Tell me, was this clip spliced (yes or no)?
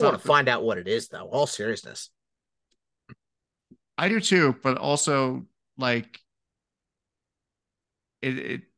no